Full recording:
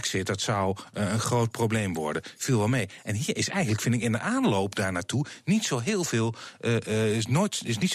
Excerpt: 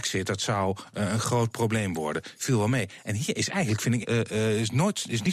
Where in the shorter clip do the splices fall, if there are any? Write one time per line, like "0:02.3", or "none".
0:04.0